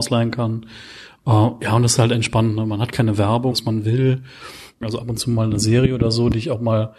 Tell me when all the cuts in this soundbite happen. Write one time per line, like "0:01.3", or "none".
0:03.5
0:04.8

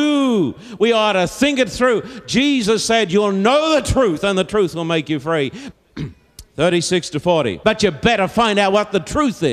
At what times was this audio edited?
0:05.7
0:07.6

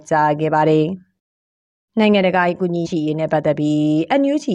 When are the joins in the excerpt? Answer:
0:02.8

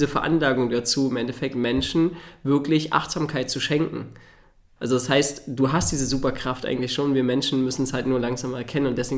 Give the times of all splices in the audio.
0:04.8

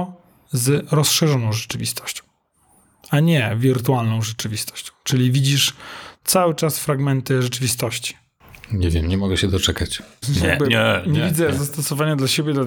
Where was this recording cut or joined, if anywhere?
0:10.2

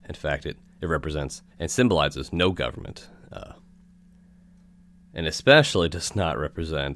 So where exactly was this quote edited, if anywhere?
0:01.5

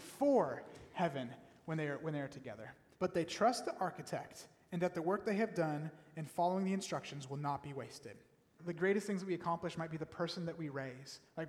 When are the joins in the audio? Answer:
0:02.9
0:08.6

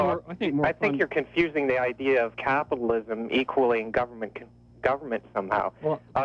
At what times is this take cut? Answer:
none

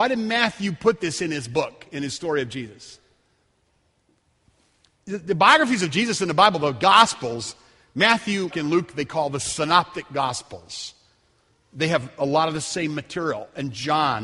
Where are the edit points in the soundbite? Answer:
0:08.5

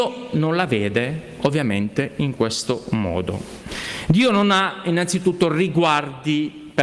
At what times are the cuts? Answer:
none

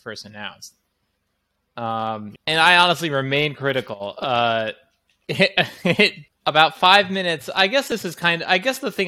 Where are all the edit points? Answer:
0:02.4
0:06.3

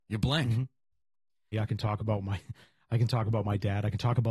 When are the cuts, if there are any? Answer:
0:01.5

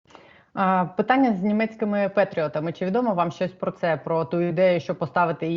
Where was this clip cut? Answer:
none

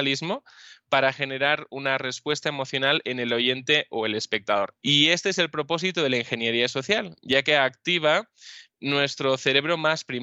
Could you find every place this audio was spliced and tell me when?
0:04.7

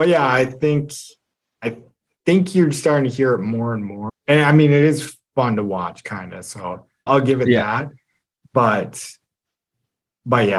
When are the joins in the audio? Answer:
0:04.1
0:07.1

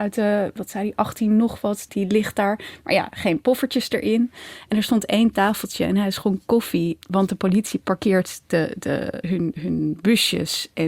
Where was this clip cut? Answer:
0:01.9
0:07.0
0:09.2

